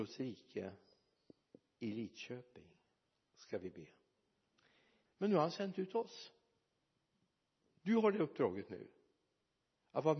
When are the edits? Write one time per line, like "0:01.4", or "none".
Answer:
0:05.1